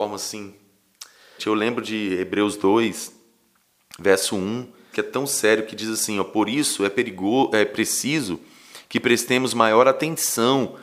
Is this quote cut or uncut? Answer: cut